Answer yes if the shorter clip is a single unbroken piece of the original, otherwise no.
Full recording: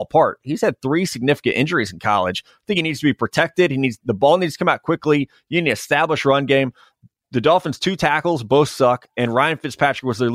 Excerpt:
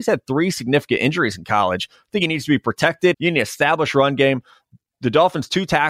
no